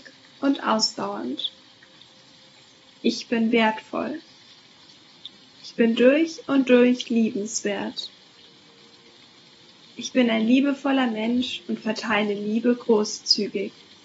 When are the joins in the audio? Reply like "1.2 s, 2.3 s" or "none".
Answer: none